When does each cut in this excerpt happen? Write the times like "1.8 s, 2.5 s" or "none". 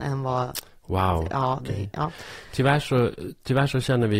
1.6 s